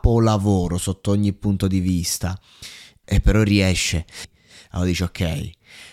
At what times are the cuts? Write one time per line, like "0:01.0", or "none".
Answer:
0:03.0
0:04.2